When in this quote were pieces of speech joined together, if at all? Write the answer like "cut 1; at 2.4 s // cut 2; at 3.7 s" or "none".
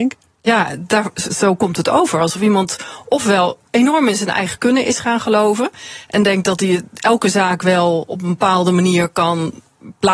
cut 1; at 1.3 s